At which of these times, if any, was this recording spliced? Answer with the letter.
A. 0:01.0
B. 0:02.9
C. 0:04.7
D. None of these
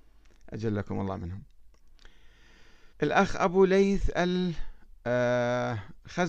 B